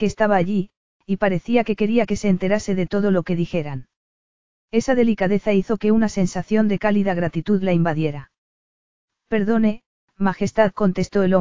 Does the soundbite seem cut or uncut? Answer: uncut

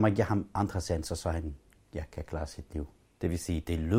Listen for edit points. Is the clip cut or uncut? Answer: cut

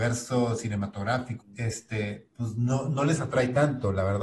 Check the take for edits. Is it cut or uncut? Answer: cut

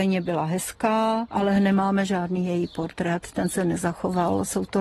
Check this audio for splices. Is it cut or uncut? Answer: uncut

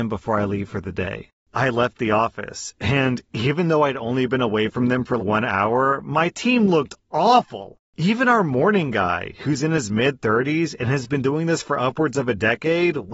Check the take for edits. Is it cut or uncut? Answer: cut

